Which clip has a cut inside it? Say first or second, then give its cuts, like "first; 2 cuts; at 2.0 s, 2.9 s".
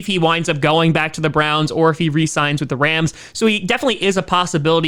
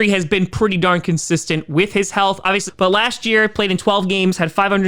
second; 1 cut; at 2.7 s